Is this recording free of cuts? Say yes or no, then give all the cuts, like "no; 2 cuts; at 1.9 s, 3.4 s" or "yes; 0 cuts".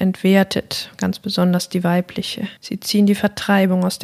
no; 1 cut; at 2.6 s